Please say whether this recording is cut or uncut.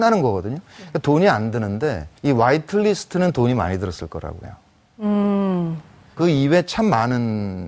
cut